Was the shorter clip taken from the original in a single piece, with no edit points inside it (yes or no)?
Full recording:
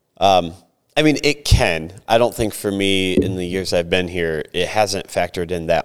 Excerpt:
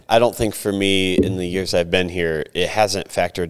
yes